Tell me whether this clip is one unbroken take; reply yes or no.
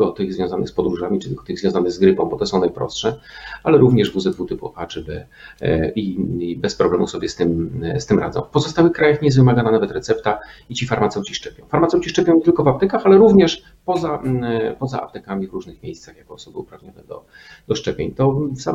yes